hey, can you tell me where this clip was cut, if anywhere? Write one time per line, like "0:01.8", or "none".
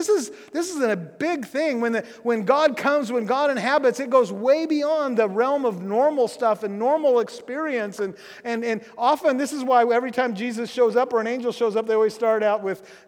none